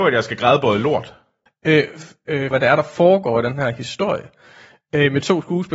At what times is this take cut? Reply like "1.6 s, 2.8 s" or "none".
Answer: 1.5 s, 2.5 s